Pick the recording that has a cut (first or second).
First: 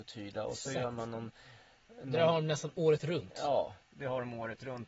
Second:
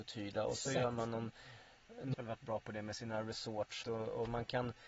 second